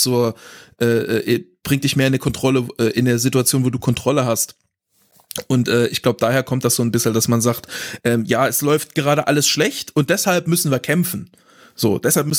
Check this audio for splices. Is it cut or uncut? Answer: uncut